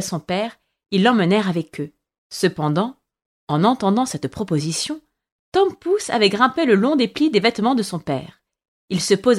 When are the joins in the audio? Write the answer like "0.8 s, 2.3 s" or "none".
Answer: 2.2 s